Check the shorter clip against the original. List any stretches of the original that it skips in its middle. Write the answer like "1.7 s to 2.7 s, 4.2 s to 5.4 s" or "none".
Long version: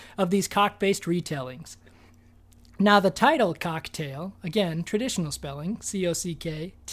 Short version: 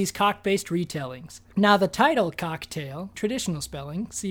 1.9 s to 2.7 s, 4.4 s to 4.8 s